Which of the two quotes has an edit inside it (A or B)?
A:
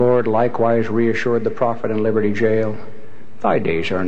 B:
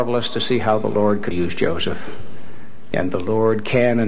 B